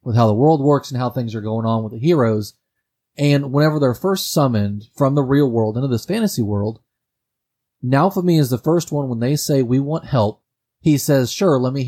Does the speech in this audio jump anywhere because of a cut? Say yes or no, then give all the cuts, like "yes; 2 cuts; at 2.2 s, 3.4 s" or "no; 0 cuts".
no; 0 cuts